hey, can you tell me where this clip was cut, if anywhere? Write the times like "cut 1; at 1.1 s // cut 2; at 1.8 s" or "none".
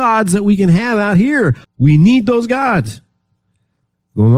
cut 1; at 1.6 s